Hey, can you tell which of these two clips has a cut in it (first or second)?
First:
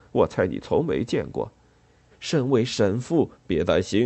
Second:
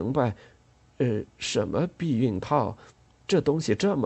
first